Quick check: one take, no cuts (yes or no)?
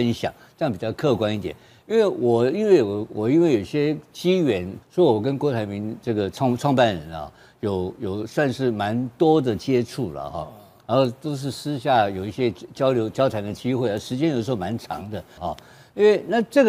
no